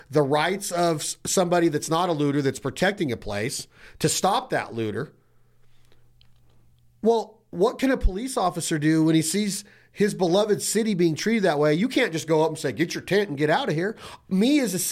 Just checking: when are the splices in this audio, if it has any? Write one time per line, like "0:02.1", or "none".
none